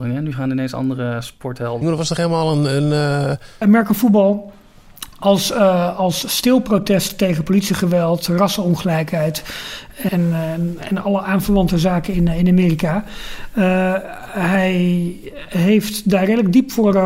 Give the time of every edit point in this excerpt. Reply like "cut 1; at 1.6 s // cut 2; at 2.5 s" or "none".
cut 1; at 1.8 s // cut 2; at 3.6 s // cut 3; at 10.1 s